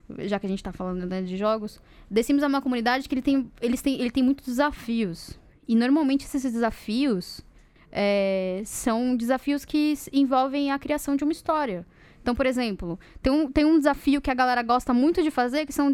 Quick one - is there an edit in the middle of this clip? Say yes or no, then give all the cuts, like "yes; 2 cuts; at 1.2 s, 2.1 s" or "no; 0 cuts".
no; 0 cuts